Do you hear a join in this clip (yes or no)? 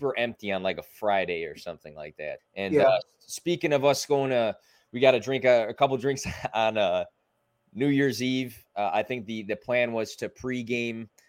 yes